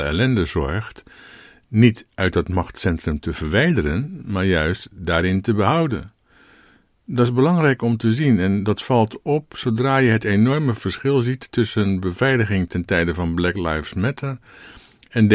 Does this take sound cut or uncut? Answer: uncut